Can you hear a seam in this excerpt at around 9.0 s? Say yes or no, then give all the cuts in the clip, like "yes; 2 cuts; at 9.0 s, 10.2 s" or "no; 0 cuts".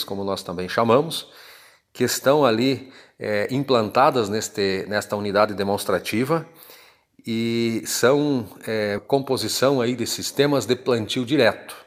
yes; 1 cut; at 9.0 s